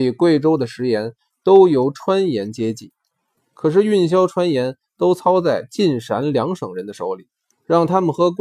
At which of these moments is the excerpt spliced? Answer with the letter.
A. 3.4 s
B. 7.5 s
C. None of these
B